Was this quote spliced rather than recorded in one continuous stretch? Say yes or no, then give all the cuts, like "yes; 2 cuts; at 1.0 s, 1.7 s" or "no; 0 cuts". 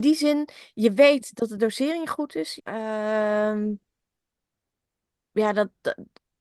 yes; 1 cut; at 2.6 s